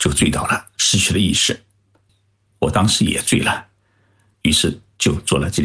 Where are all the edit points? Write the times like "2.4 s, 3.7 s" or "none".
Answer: 2.1 s, 4.3 s